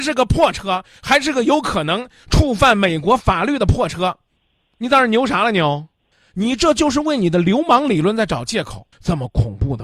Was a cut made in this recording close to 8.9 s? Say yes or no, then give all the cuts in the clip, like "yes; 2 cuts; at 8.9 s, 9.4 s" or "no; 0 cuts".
yes; 1 cut; at 8.9 s